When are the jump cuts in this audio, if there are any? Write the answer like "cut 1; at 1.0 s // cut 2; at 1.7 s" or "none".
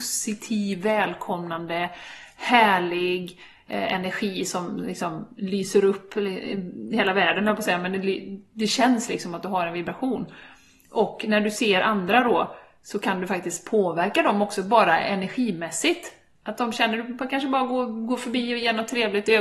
none